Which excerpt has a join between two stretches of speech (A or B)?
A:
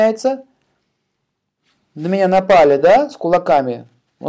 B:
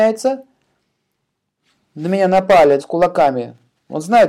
B